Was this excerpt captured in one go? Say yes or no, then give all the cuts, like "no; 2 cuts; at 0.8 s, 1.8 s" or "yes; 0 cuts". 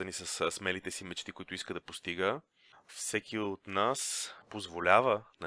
yes; 0 cuts